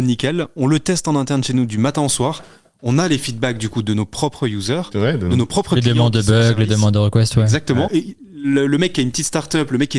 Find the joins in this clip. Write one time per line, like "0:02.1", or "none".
0:07.9